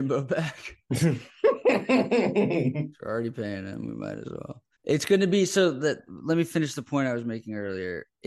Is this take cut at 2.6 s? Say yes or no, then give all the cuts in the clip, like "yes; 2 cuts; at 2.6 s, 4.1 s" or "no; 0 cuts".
no; 1 cut; at 4.7 s